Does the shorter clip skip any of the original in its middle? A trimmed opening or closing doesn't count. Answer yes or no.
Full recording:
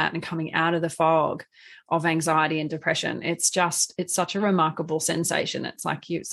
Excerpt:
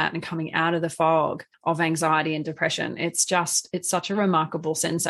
yes